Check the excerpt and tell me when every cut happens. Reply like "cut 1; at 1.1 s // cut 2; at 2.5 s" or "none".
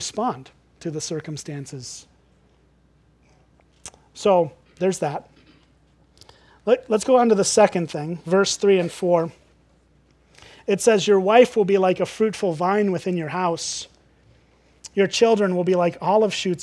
none